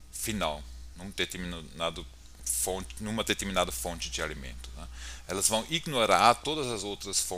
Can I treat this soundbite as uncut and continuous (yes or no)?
yes